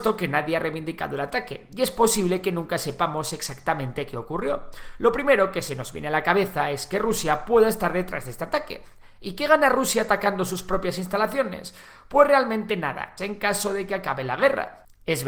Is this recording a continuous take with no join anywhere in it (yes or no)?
no